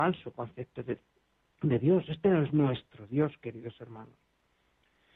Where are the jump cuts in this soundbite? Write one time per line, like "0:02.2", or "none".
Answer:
none